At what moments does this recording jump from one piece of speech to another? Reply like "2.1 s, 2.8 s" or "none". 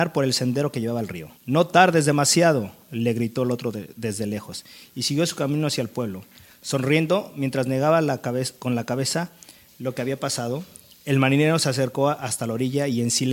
1.4 s